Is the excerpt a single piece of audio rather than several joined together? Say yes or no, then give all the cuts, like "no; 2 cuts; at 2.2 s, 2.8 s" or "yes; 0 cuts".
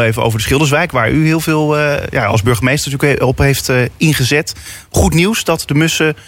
yes; 0 cuts